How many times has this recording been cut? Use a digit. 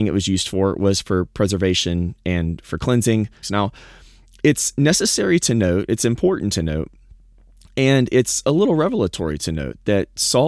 1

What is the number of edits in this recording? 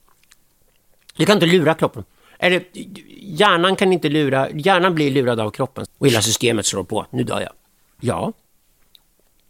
2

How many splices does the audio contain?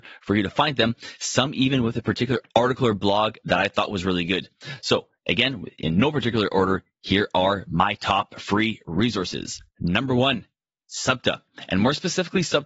1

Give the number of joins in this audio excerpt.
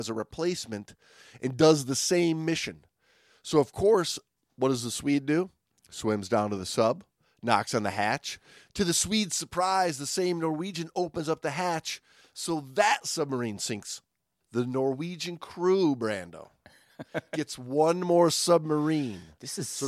0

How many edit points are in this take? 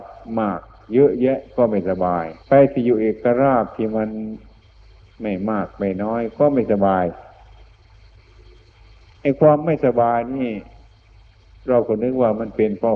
1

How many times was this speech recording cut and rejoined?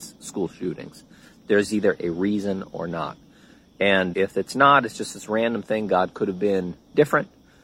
1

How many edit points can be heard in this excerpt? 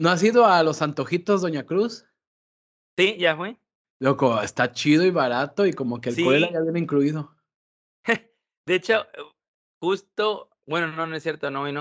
0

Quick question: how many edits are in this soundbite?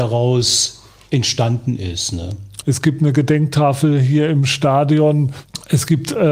1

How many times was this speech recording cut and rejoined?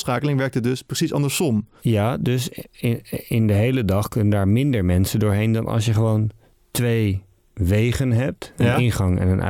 1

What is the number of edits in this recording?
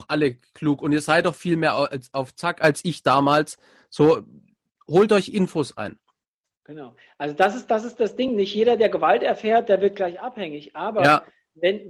0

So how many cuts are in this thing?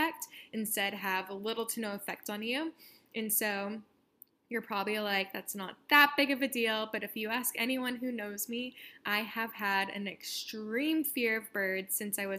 0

